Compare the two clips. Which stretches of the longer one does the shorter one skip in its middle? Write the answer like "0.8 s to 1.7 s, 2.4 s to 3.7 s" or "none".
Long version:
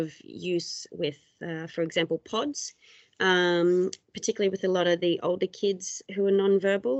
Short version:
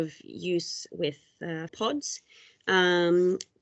1.7 s to 2.2 s